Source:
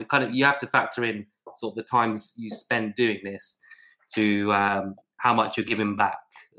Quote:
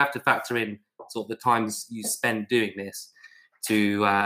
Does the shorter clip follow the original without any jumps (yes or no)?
yes